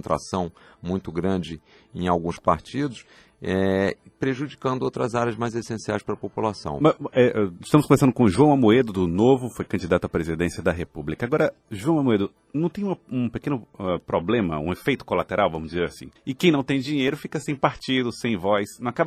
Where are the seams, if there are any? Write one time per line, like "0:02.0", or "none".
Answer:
0:16.2